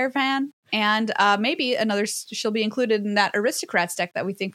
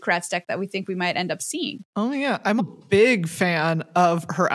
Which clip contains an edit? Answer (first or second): second